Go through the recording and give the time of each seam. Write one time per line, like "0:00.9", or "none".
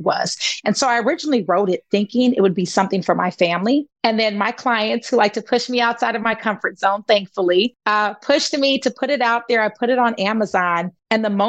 none